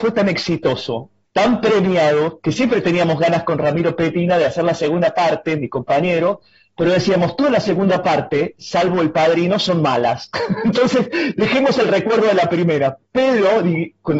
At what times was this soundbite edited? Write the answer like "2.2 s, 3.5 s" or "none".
1.3 s